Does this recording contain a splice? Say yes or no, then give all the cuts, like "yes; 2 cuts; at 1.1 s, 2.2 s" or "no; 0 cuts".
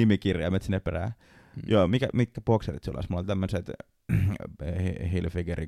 yes; 1 cut; at 2.1 s